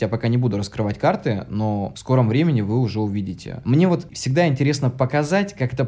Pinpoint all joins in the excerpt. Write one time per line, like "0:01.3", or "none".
0:03.6

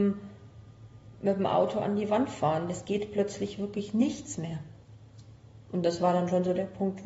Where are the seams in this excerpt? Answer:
0:01.1

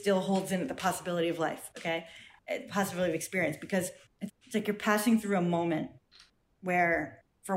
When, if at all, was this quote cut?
0:04.3

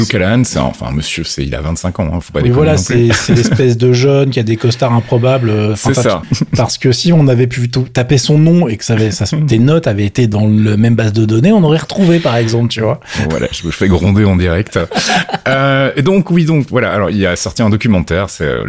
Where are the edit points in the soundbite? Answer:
0:06.2

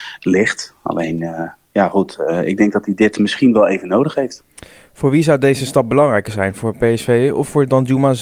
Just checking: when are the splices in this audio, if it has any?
none

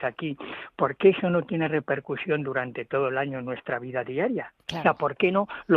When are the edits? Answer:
0:04.6

